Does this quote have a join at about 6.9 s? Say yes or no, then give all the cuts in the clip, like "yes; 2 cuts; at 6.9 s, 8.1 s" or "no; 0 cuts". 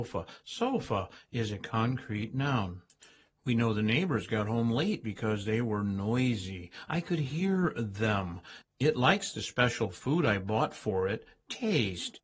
no; 1 cut; at 8.6 s